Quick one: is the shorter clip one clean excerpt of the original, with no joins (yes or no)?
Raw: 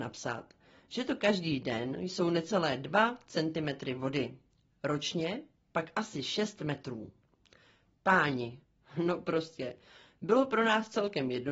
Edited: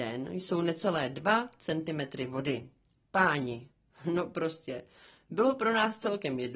no